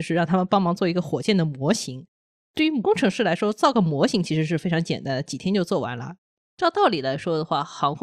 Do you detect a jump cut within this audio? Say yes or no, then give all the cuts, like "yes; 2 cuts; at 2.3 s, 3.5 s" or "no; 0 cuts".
yes; 1 cut; at 6.4 s